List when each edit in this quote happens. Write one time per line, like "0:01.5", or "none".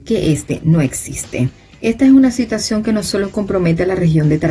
none